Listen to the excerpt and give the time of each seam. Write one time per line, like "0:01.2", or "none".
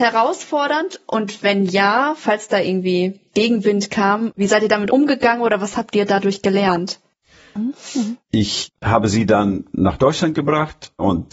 0:07.6

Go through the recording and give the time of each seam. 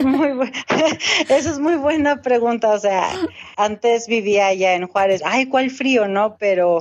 0:03.5
0:05.2

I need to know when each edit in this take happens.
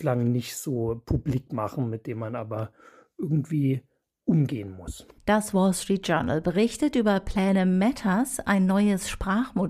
0:05.2

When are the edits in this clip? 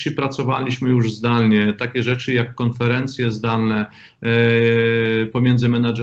none

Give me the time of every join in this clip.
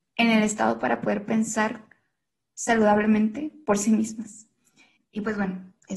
0:05.0

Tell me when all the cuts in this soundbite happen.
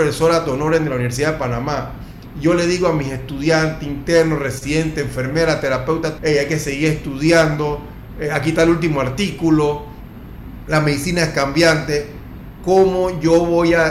0:06.2

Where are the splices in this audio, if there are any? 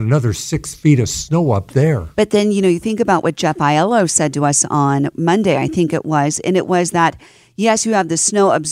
none

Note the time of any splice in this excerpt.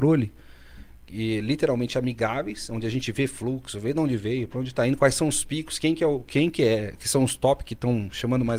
none

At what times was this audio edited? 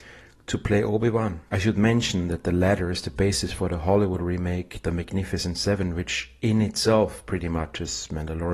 0:01.5

